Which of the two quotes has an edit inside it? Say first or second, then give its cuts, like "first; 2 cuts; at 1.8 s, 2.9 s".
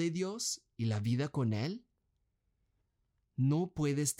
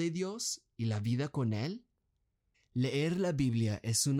second; 1 cut; at 2.5 s